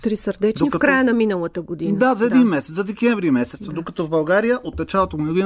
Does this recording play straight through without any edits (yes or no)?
yes